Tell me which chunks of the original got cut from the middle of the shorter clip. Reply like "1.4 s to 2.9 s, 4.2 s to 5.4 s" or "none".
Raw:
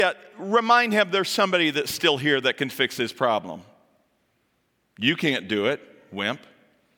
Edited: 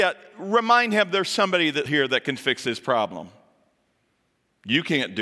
1.9 s to 2.2 s